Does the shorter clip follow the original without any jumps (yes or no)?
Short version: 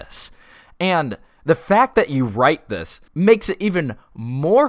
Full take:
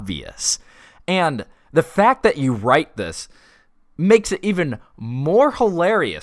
no